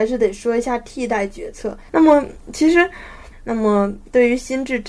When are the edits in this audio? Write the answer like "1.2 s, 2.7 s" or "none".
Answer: 1.9 s, 3.3 s

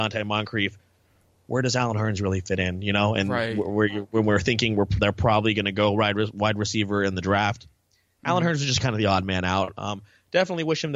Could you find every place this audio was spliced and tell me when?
none

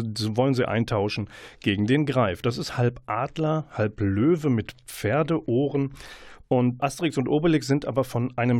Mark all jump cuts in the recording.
6.8 s

